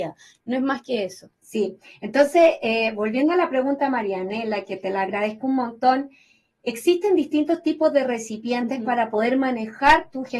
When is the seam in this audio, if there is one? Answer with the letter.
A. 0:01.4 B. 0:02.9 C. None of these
A